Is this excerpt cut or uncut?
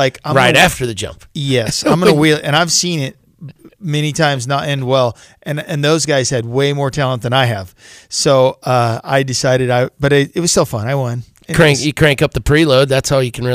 uncut